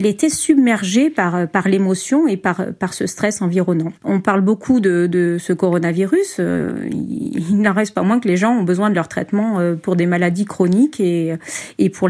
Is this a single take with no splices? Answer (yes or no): no